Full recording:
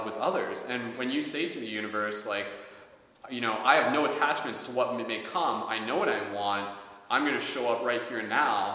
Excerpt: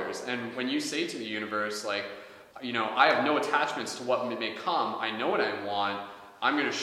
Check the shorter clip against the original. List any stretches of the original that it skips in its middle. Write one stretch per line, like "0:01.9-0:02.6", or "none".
0:02.9-0:03.2